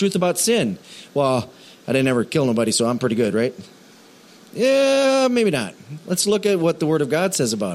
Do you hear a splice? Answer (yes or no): no